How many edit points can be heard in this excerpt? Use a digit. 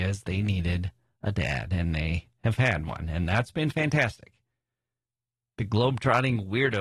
0